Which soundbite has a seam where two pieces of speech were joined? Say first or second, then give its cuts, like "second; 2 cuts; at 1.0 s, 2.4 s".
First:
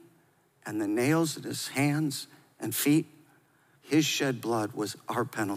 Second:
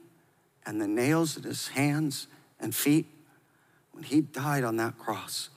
first; 1 cut; at 3.7 s